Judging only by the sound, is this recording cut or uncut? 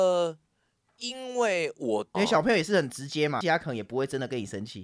cut